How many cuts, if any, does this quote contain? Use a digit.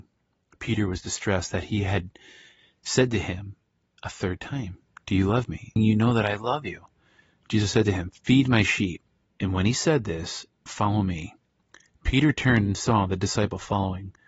3